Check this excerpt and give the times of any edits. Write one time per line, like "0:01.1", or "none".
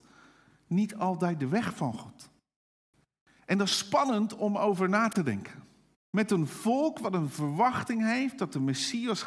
0:06.0